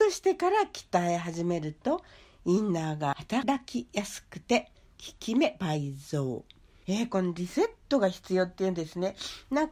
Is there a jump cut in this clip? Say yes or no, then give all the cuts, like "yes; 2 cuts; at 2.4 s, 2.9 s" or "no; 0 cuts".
no; 0 cuts